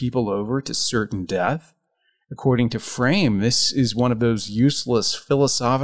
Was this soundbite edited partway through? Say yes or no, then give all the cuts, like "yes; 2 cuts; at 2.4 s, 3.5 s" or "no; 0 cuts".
no; 0 cuts